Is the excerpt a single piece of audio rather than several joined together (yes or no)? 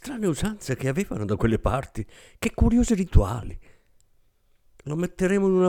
yes